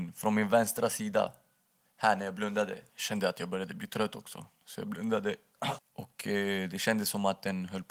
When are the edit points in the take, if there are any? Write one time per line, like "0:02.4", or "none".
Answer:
0:02.9
0:05.8

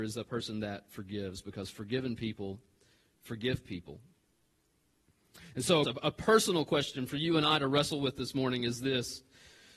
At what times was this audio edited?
0:05.8

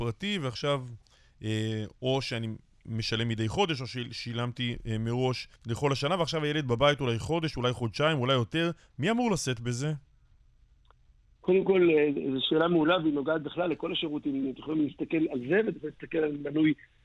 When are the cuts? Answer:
0:05.6

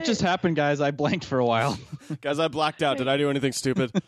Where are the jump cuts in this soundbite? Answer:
none

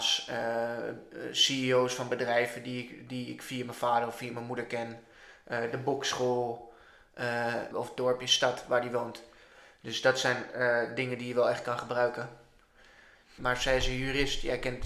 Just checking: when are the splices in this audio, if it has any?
0:07.7
0:13.4

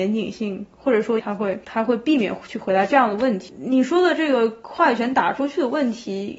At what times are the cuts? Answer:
0:01.2

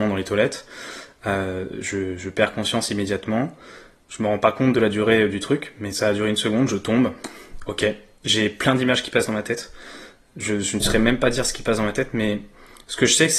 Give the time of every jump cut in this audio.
0:04.0

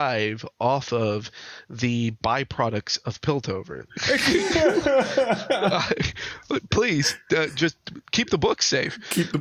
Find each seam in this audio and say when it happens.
0:03.9

